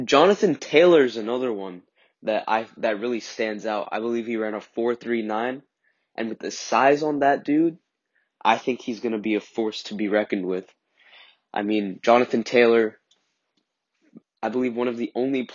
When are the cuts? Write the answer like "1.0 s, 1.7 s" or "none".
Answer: 14.2 s